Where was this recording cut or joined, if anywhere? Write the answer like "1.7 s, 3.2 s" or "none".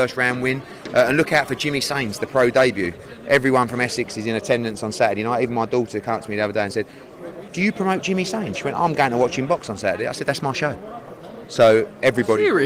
8.5 s